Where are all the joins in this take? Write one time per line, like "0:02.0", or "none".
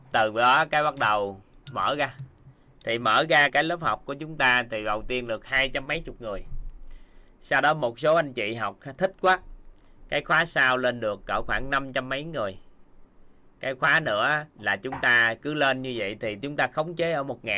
0:03.5
0:14.5

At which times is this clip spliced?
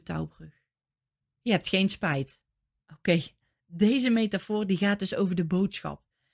0:01.2
0:02.8

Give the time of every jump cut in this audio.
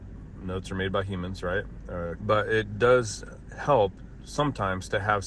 0:02.2

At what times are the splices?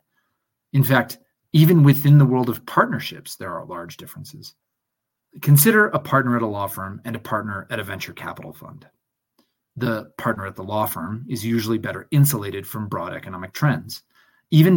none

